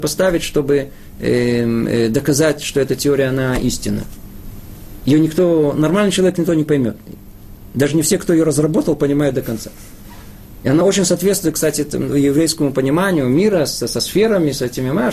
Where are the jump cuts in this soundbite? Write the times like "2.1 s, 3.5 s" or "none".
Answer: none